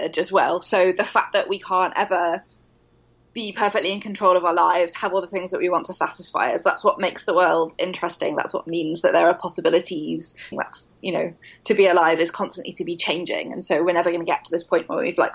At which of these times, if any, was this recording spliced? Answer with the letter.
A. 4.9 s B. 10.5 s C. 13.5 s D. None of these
B